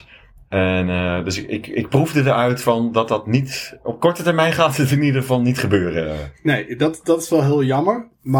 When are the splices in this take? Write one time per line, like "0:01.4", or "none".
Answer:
none